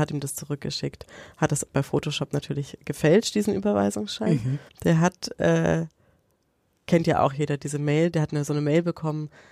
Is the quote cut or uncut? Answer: cut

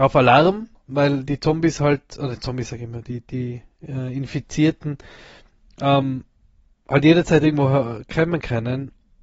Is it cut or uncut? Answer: uncut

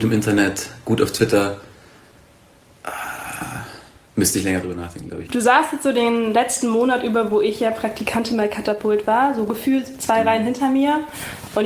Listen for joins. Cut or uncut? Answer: uncut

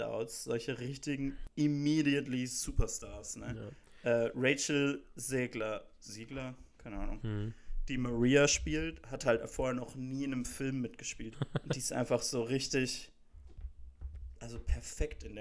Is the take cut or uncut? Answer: cut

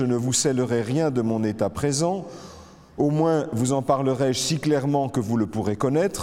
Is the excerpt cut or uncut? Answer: uncut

